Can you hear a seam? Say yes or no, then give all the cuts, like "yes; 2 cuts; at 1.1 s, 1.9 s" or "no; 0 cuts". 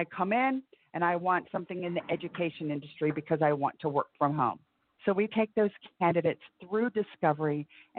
yes; 1 cut; at 5.0 s